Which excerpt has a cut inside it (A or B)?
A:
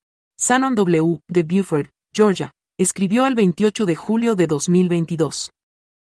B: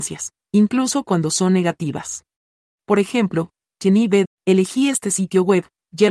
B